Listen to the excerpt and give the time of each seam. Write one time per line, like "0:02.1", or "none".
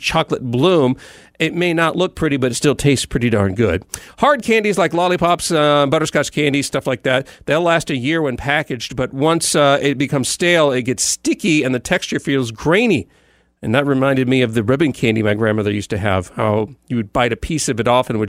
none